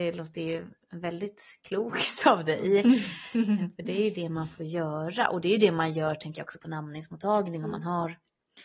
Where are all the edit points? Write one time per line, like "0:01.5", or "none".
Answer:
none